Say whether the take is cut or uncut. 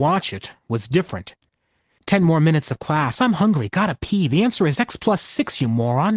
uncut